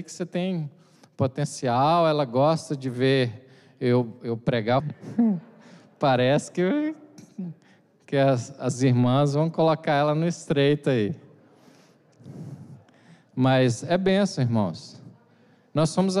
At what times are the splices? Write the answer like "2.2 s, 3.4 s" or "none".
4.8 s